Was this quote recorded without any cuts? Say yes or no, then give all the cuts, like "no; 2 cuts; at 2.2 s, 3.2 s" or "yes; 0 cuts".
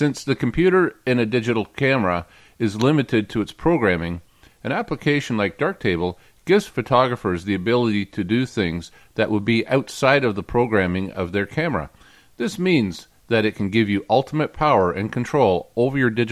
yes; 0 cuts